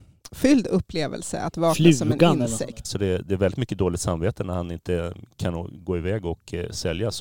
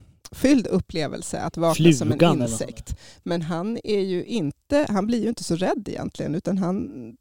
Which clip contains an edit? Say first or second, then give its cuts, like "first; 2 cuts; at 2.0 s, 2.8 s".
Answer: first; 1 cut; at 2.8 s